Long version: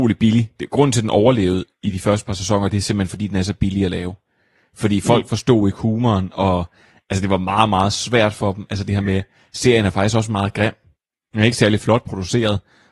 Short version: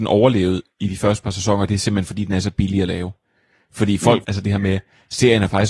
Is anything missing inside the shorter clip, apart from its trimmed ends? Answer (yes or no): yes